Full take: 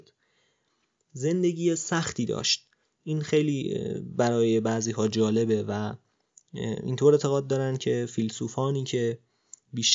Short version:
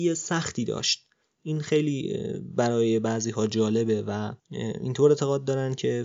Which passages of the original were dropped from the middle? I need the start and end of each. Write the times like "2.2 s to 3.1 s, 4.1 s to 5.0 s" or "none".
6.0 s to 6.4 s